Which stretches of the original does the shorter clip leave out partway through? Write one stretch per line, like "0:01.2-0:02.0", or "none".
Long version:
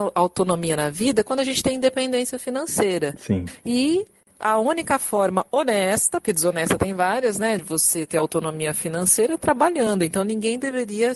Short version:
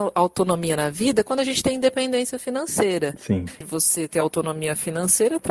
0:03.6-0:07.6